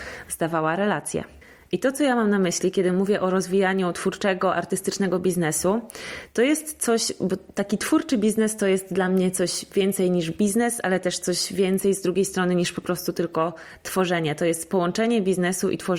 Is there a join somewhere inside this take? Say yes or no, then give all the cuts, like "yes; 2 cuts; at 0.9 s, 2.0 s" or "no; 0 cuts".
no; 0 cuts